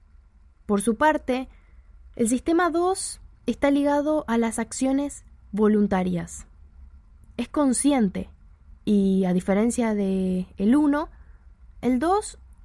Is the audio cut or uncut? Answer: uncut